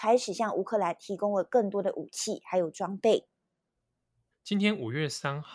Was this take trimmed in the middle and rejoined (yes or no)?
yes